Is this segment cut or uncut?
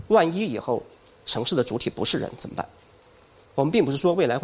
uncut